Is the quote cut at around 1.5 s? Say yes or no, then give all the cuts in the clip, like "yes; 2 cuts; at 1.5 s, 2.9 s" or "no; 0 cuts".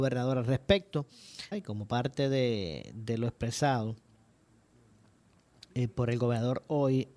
yes; 1 cut; at 1.5 s